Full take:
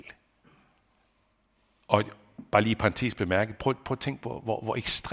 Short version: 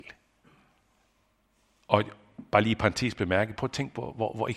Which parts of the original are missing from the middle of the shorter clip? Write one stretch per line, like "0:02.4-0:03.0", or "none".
0:03.5-0:03.8